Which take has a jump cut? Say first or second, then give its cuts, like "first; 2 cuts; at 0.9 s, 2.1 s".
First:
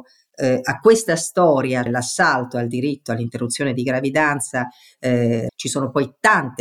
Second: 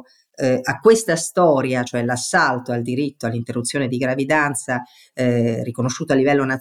first; 2 cuts; at 1.9 s, 5.5 s